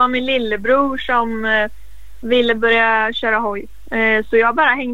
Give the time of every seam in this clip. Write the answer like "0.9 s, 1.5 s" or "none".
none